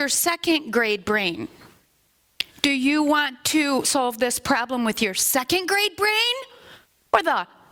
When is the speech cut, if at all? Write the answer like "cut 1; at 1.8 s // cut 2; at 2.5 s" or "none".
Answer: none